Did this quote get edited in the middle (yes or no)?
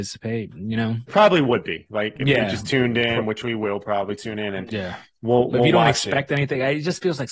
yes